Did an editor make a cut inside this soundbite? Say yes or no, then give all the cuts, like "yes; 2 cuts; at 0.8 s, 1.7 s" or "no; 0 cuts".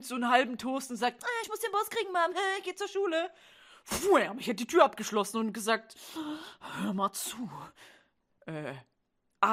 no; 0 cuts